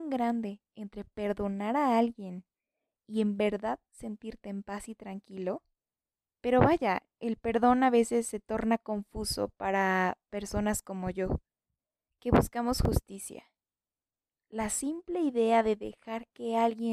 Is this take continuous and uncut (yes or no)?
yes